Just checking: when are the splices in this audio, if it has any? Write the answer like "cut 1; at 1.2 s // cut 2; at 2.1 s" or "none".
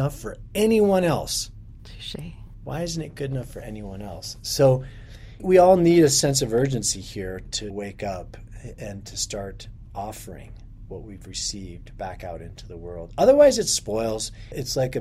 none